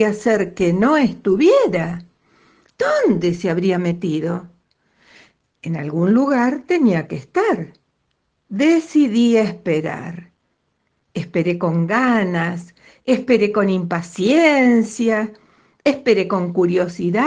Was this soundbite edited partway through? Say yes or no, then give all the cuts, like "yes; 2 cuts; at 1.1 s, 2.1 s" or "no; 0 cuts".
no; 0 cuts